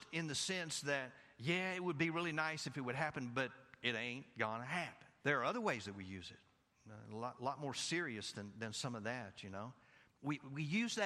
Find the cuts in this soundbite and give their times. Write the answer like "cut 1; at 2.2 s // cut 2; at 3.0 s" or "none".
cut 1; at 5.2 s // cut 2; at 10.1 s